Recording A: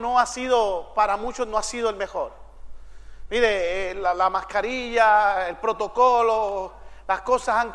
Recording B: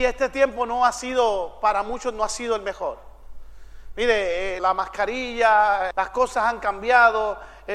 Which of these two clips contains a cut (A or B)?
B